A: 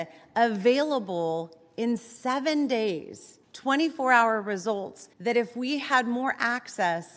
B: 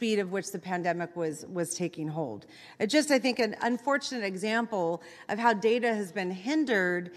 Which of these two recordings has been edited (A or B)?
A